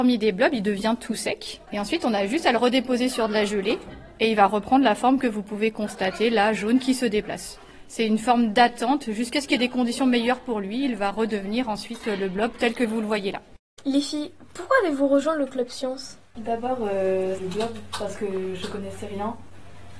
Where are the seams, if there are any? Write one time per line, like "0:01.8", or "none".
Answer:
0:17.4